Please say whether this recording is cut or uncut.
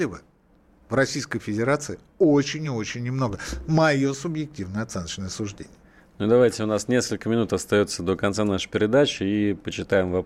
uncut